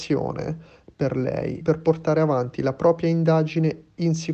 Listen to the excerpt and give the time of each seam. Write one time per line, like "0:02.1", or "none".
0:01.6